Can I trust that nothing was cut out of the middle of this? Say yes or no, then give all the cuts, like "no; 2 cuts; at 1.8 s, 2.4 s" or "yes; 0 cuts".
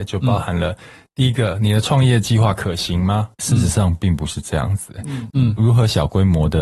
no; 2 cuts; at 3.4 s, 5.3 s